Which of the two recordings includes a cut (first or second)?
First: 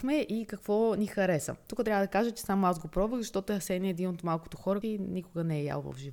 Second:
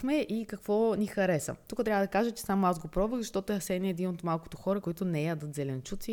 first